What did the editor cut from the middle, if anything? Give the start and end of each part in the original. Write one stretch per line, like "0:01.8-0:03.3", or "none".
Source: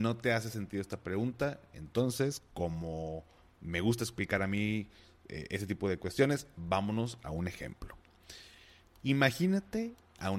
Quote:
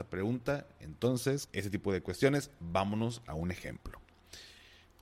0:02.5-0:05.5

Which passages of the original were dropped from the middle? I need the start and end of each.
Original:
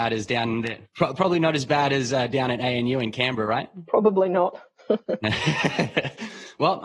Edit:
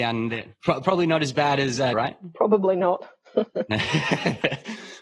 0:02.3-0:03.5

